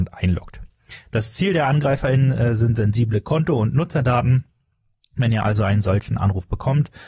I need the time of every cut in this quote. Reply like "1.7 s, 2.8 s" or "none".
1.0 s